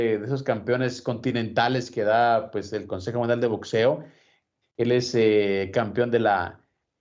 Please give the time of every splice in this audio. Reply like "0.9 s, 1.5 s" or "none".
4.6 s

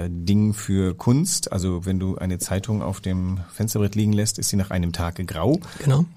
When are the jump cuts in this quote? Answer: none

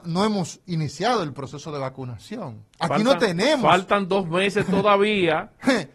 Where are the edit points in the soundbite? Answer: 2.7 s

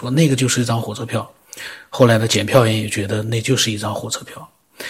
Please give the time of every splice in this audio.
none

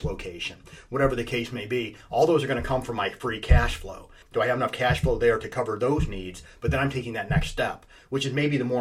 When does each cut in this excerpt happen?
4.2 s

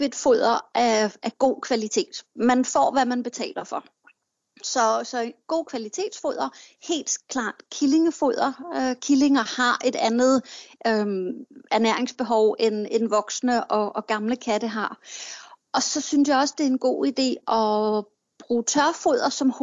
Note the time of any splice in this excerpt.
none

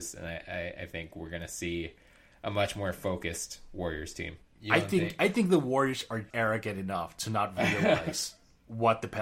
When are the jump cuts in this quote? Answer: 4.4 s, 6.3 s

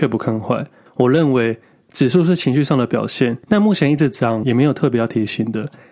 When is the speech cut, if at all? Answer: 3.4 s, 4.4 s

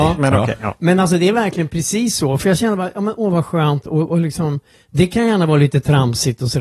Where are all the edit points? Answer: none

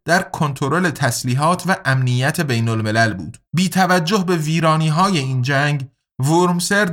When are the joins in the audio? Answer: 3.4 s

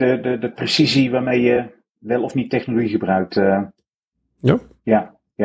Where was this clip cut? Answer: none

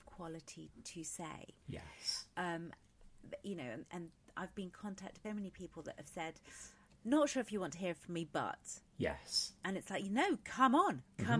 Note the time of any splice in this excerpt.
5.2 s

